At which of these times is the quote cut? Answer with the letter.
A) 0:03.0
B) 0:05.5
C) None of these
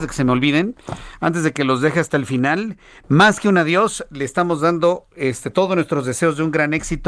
A